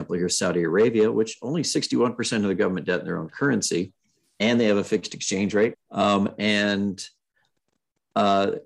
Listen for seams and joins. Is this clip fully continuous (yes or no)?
no